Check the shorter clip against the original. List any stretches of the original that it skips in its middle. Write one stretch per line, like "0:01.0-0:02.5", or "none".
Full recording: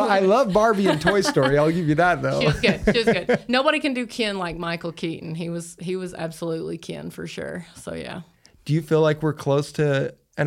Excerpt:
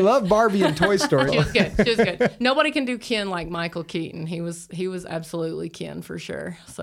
0:01.5-0:02.3